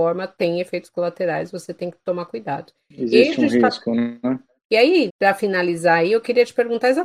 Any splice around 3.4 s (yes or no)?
no